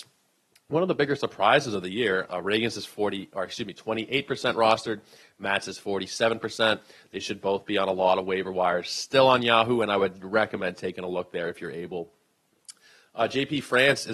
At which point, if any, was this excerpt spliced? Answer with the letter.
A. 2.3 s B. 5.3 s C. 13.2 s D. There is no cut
A